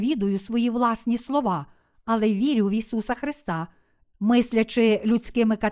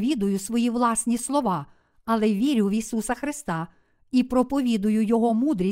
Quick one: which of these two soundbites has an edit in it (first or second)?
first